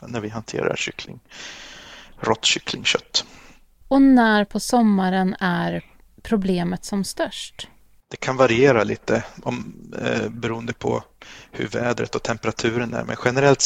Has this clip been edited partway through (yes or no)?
no